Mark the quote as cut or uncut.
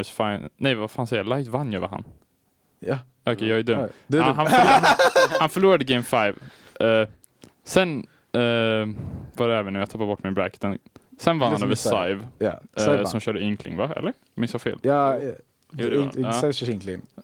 uncut